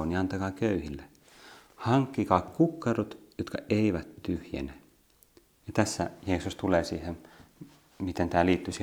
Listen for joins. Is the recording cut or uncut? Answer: uncut